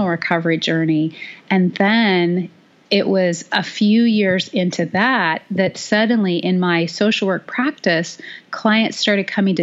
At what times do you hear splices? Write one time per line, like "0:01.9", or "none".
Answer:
none